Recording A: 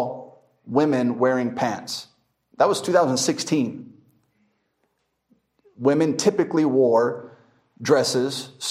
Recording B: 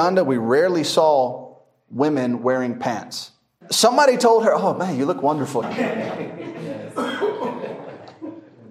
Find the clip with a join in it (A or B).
B